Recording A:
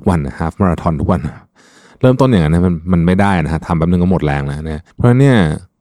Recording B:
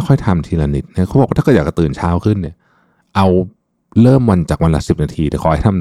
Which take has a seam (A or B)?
A